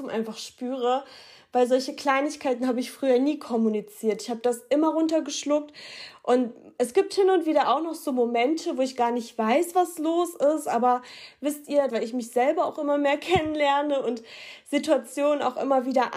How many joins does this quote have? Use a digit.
1